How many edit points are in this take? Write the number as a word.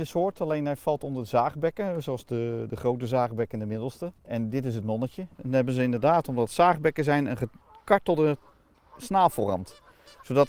one